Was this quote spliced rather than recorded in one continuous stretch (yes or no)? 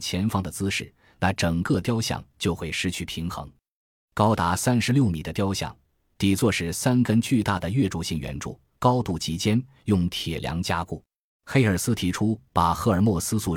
yes